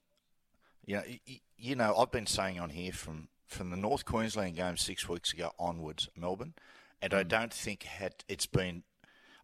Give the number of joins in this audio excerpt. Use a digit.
1